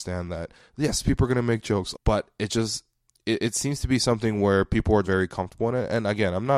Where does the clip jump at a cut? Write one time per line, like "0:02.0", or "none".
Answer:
0:01.9
0:05.0